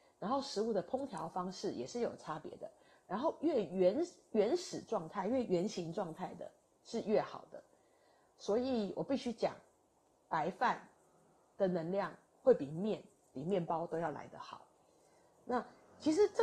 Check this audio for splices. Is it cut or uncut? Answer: uncut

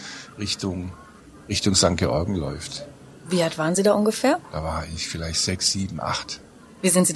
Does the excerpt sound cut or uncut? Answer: uncut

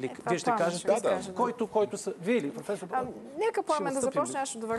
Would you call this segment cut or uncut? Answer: uncut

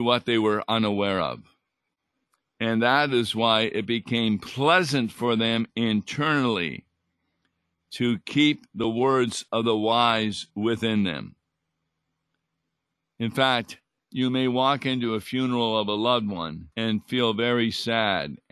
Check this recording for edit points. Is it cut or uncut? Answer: cut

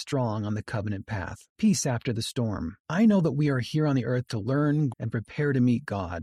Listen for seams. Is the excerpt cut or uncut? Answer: cut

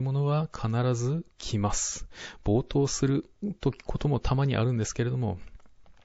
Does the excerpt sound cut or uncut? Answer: cut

